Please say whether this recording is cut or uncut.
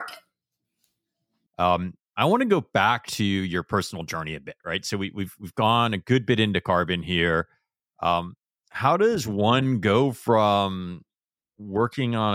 cut